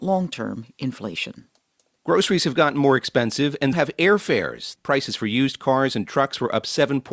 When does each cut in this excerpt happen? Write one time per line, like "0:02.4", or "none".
0:03.7
0:04.8